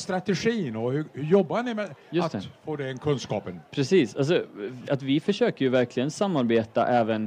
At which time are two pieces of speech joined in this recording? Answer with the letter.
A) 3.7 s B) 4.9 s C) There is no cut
B